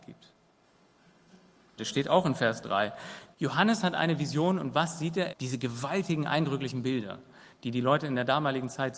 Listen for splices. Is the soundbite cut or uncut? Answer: cut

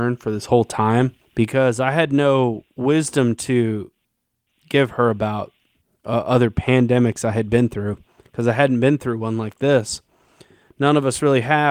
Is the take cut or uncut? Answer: uncut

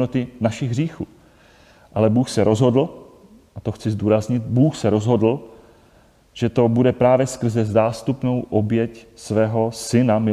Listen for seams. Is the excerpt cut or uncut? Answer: uncut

